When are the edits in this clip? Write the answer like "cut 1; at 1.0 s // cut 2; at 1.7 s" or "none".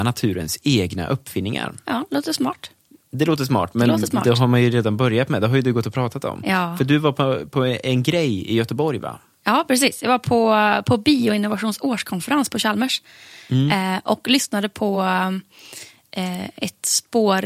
none